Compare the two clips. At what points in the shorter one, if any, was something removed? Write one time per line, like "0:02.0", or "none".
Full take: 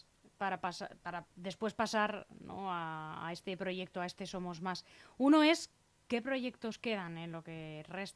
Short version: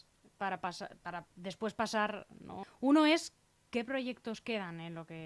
0:02.6